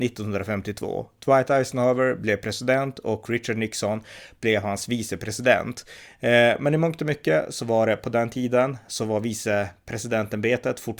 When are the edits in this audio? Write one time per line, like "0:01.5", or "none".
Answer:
none

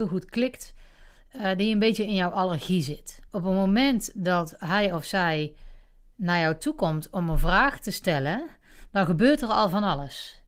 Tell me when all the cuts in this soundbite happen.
0:03.3

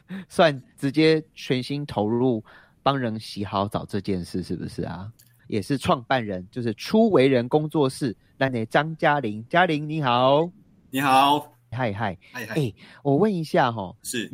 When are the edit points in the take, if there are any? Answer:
0:05.4
0:11.7

